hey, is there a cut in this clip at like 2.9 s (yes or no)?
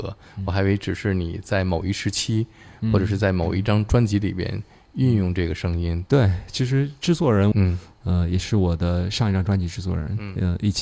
no